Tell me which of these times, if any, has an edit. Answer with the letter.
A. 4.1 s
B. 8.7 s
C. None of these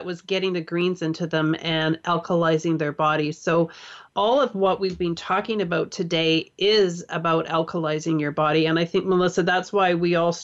A